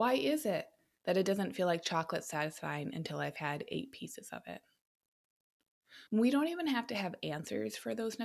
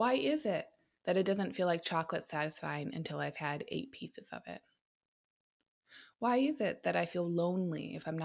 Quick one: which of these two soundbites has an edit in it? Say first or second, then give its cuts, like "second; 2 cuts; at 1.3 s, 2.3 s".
first; 1 cut; at 6.1 s